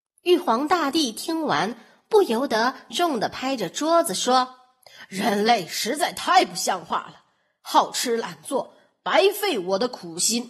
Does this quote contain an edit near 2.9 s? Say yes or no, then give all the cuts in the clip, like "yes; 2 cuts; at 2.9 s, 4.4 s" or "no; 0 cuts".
yes; 1 cut; at 2.9 s